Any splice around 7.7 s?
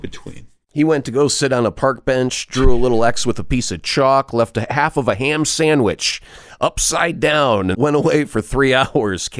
yes; 1 cut; at 7.7 s

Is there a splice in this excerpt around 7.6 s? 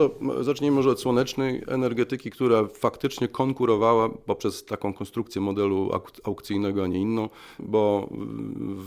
yes; 1 cut; at 7.6 s

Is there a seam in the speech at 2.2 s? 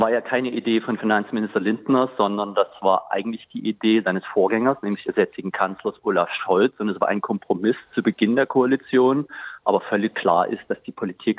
no; 0 cuts

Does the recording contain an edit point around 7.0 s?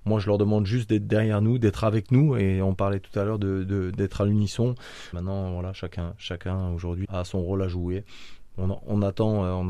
yes; 2 cuts; at 5.1 s, 7.0 s

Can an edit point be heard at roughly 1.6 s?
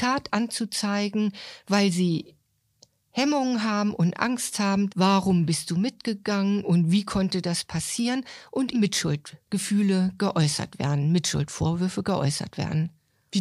no; 2 cuts; at 4.9 s, 8.7 s

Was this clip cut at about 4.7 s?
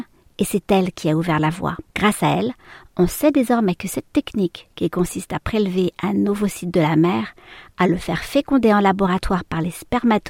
no; 1 cut; at 1.9 s

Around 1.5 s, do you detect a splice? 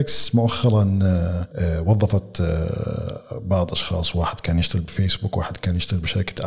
yes; 1 cut; at 1.5 s

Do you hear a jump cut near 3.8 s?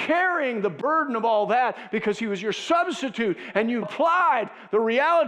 yes; 1 cut; at 3.8 s

